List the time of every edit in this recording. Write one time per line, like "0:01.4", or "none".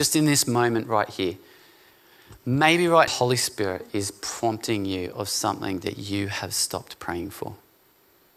0:03.1